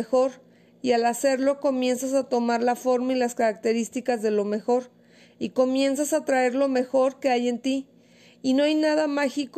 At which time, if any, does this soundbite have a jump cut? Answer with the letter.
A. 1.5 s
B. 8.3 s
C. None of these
C